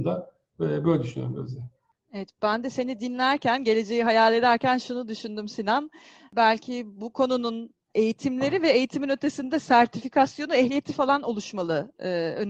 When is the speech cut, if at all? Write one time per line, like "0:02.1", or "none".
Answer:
none